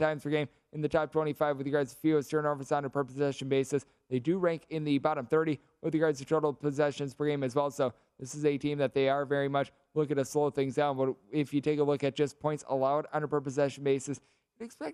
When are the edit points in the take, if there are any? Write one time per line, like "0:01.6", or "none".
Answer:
none